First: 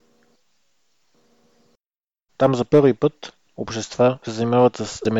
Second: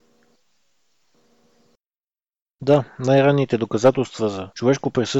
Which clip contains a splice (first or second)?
first